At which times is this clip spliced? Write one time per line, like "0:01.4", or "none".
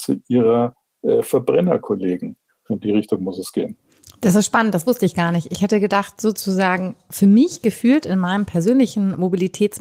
0:02.7

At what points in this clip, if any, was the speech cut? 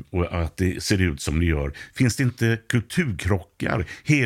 none

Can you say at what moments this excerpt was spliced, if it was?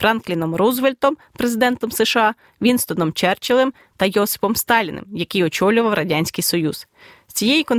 0:03.9

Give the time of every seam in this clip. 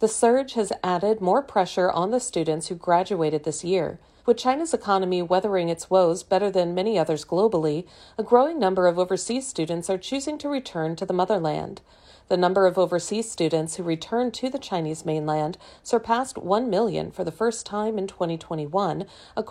0:04.2

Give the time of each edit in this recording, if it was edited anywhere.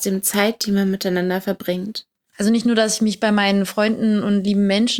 0:02.3

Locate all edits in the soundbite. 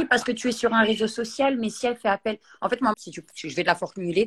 0:02.9

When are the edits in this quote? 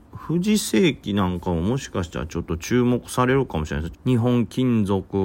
0:03.9

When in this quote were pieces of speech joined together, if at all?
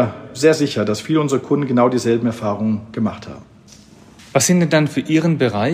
none

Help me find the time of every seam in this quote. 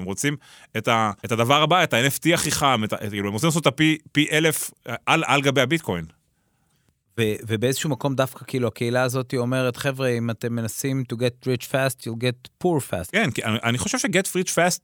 0:01.2
0:13.1

